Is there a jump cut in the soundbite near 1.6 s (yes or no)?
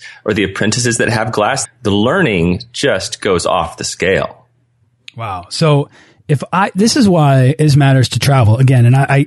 yes